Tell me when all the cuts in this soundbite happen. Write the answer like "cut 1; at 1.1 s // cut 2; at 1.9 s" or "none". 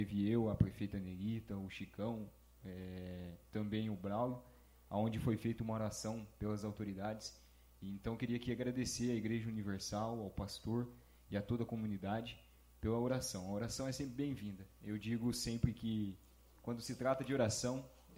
none